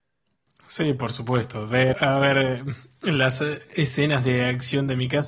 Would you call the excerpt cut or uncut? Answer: cut